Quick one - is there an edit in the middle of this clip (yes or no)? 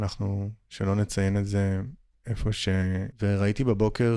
yes